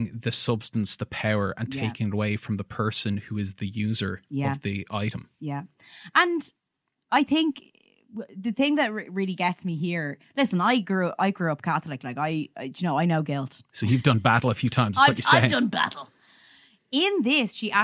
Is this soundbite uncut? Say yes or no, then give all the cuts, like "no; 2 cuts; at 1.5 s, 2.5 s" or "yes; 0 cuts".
yes; 0 cuts